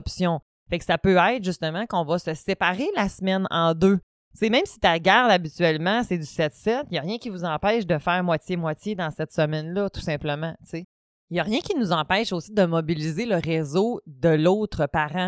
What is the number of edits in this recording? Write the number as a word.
zero